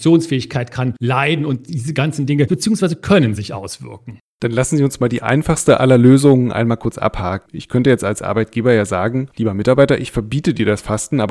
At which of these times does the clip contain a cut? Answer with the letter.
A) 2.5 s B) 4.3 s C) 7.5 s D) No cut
A